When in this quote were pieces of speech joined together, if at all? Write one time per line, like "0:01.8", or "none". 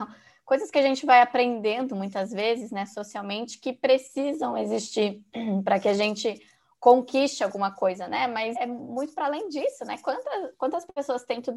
0:08.5

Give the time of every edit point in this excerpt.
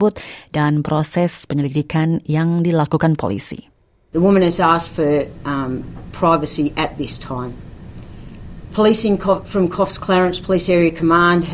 0:04.1

